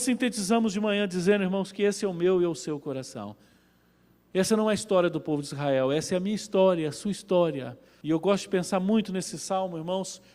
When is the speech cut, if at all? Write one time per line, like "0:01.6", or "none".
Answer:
0:08.0